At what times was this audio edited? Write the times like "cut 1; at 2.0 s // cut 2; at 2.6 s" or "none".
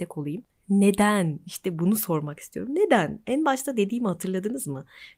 none